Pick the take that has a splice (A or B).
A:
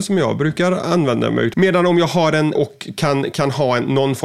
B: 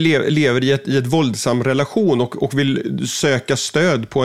A